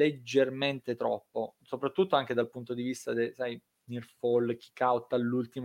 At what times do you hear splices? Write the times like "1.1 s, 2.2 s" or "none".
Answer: 1.6 s